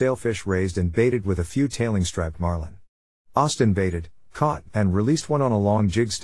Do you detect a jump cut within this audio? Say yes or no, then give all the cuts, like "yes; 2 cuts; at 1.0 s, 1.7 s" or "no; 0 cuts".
no; 0 cuts